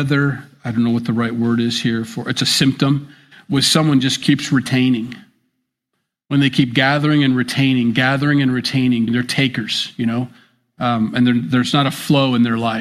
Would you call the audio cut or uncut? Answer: cut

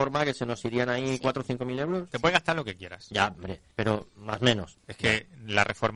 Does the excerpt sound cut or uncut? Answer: cut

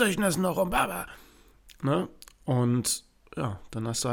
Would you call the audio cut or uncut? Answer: uncut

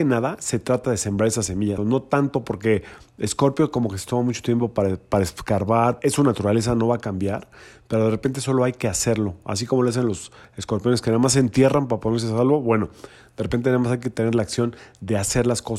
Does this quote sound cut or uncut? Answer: cut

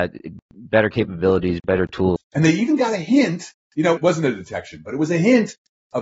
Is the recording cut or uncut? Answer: cut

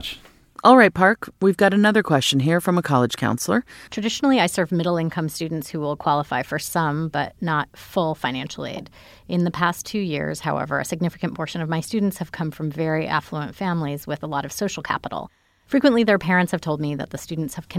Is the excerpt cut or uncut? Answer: cut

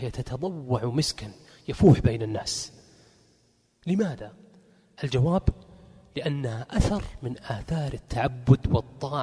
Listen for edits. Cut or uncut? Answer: uncut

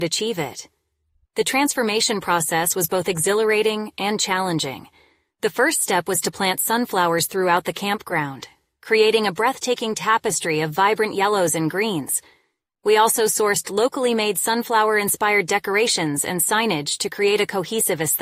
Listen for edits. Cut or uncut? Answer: uncut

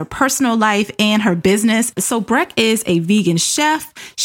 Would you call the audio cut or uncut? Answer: uncut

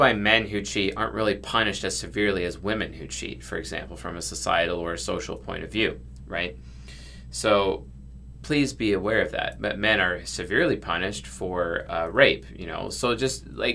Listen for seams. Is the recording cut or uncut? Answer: uncut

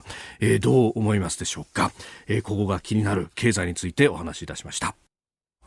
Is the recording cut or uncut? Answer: uncut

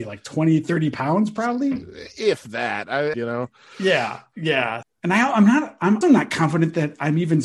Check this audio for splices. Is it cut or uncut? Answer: cut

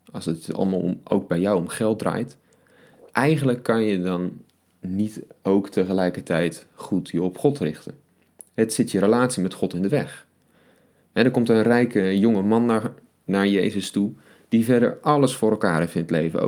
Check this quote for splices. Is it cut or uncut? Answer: uncut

